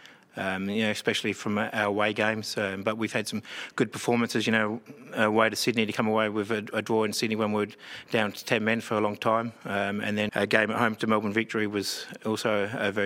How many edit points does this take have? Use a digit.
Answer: 1